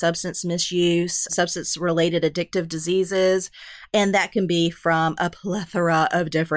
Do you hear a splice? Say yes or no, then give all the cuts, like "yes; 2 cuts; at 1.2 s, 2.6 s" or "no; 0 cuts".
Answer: yes; 2 cuts; at 1.3 s, 3.9 s